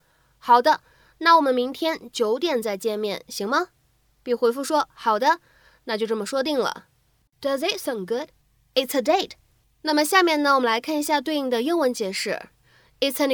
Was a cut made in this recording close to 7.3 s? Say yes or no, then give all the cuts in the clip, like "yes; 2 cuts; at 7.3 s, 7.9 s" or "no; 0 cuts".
yes; 2 cuts; at 7.3 s, 9.6 s